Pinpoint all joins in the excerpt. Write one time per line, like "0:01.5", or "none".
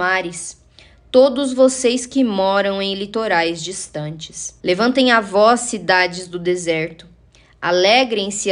0:04.6